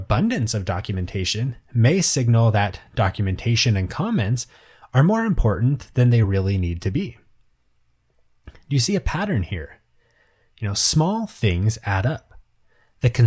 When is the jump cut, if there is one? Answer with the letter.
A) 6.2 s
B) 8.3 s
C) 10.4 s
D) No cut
D